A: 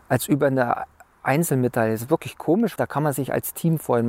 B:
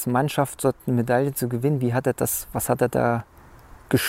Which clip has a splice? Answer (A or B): A